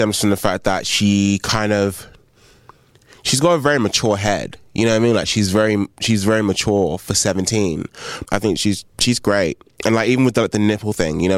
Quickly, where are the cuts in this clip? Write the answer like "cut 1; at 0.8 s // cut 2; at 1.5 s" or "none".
cut 1; at 8.2 s